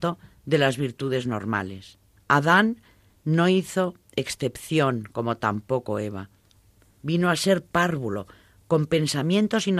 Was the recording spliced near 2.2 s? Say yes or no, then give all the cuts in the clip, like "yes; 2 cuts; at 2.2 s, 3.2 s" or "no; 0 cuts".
yes; 1 cut; at 2.2 s